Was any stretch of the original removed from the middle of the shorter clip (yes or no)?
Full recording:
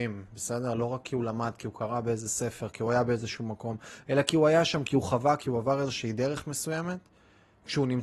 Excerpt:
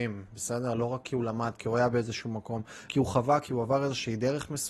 yes